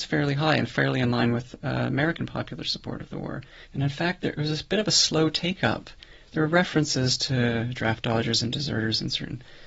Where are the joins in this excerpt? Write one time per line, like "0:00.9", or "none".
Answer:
0:03.7